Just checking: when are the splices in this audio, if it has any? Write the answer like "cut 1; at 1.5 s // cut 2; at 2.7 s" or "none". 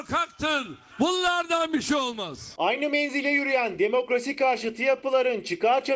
cut 1; at 0.9 s